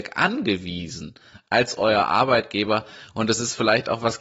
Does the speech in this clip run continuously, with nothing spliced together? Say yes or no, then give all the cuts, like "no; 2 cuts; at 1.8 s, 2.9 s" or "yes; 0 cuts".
yes; 0 cuts